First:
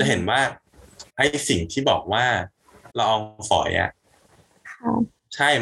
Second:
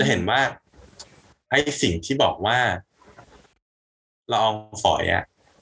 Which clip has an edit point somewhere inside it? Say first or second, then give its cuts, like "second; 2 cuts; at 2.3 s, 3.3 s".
first; 2 cuts; at 1.1 s, 2.9 s